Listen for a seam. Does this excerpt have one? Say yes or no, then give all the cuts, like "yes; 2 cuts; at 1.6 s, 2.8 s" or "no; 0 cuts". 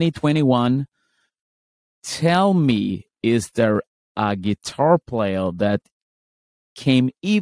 no; 0 cuts